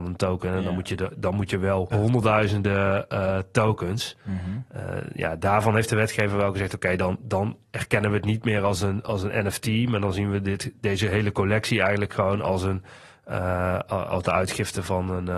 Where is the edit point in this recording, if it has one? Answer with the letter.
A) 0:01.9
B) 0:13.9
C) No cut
A